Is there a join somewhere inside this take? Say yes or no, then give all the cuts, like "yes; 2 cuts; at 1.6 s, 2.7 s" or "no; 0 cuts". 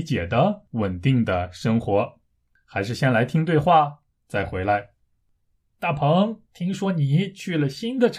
no; 0 cuts